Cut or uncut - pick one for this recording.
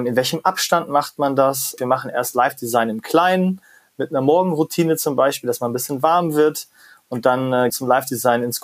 cut